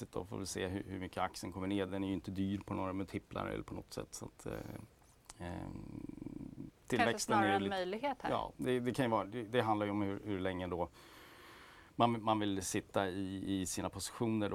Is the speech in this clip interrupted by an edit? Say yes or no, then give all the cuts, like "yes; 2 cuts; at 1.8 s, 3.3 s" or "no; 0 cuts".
no; 0 cuts